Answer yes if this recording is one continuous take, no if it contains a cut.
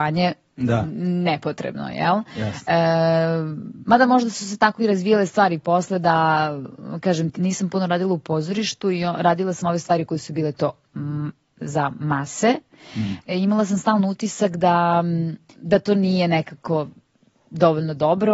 no